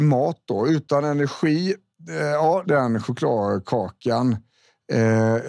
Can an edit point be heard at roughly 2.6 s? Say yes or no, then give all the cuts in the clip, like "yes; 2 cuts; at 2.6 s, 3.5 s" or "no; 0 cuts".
yes; 1 cut; at 2.6 s